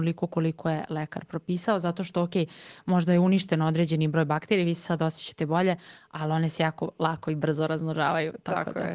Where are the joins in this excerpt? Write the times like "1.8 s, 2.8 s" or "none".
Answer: none